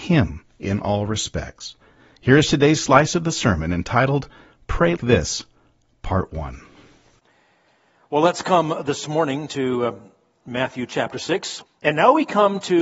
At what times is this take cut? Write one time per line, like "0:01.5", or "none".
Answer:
0:05.0
0:11.7